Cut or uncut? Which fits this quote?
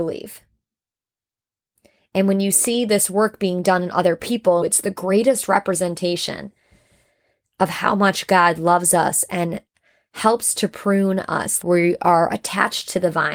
cut